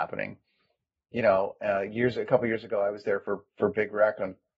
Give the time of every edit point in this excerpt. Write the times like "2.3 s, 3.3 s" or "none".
none